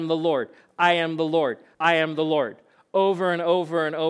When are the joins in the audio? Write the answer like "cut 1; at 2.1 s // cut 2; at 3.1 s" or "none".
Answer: cut 1; at 1.7 s